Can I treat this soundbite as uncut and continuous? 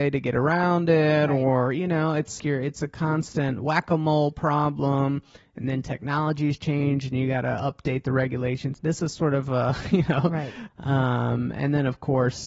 no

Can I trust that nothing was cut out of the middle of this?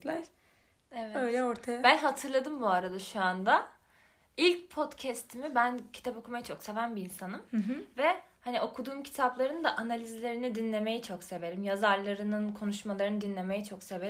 yes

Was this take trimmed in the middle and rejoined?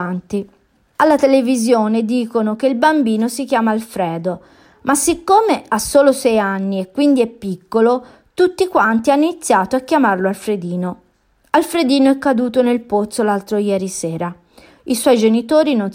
yes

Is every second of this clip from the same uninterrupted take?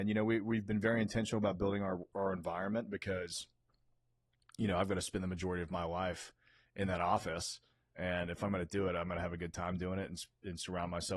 yes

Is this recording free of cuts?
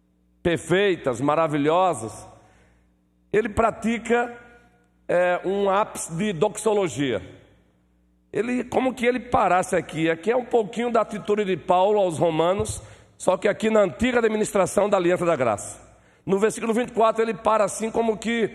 yes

